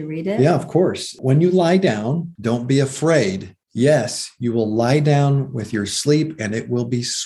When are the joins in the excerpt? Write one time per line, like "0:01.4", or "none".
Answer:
none